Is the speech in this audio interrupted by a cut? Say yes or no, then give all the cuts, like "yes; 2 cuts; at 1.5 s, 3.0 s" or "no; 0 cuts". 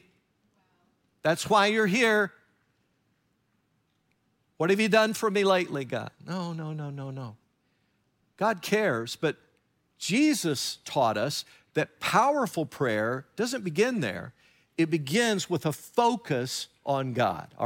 no; 0 cuts